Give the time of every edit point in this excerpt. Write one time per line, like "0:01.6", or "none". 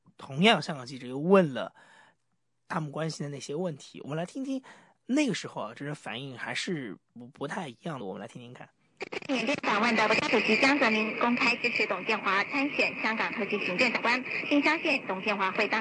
0:08.0